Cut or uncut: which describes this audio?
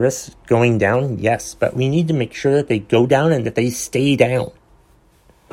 uncut